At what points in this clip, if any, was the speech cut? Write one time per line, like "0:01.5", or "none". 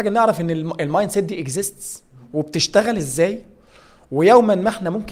none